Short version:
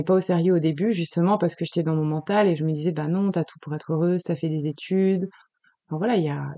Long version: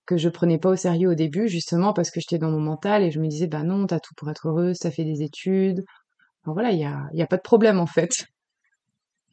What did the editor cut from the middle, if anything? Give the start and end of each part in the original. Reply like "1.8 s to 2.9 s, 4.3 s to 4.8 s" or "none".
none